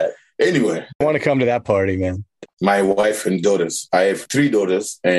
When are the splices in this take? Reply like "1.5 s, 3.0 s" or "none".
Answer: 1.0 s, 2.5 s